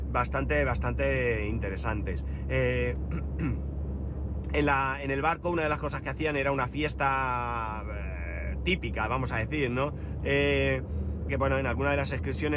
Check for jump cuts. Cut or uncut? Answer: cut